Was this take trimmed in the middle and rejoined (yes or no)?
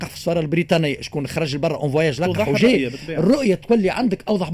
no